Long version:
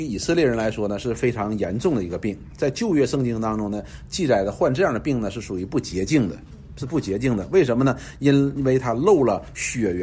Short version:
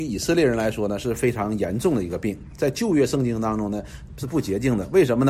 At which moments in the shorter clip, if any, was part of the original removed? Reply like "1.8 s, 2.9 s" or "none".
4.1 s